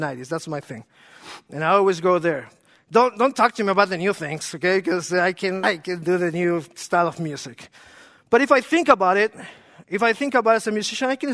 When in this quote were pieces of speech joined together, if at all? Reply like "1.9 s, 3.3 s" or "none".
5.6 s